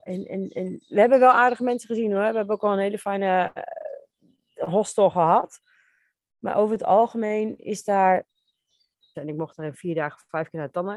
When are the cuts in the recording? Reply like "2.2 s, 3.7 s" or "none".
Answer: 9.1 s